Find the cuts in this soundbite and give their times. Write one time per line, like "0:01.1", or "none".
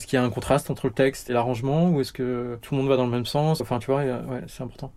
0:03.6